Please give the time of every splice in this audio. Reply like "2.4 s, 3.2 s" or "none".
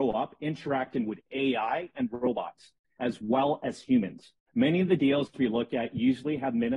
4.5 s